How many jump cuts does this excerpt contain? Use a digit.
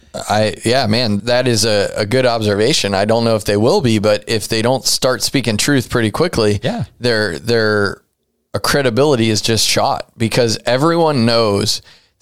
1